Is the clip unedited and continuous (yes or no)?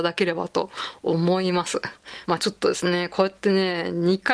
no